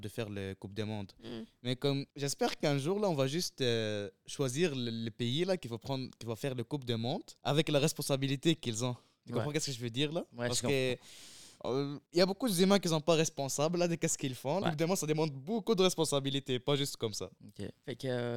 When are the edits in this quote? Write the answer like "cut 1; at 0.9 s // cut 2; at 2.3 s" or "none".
cut 1; at 14.6 s